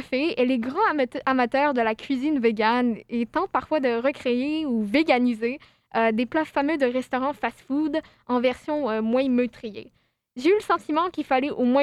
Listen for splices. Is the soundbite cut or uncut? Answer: uncut